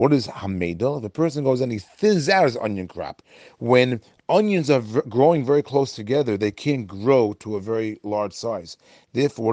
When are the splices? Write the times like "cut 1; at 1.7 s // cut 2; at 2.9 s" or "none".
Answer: none